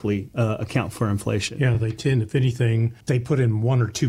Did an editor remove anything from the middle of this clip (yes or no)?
no